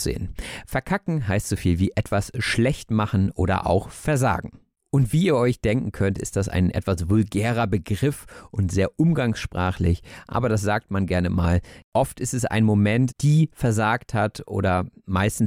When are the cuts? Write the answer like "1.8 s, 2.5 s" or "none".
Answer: 13.1 s